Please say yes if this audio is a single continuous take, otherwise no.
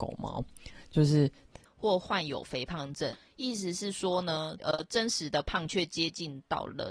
no